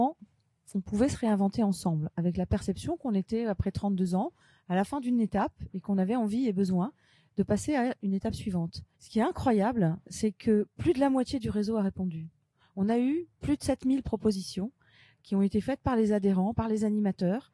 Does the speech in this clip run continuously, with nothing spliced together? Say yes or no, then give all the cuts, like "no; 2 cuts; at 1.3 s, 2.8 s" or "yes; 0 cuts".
no; 2 cuts; at 8.9 s, 16.5 s